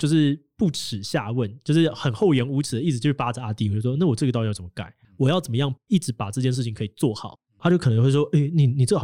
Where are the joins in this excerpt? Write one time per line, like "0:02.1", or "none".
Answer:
0:05.0
0:07.6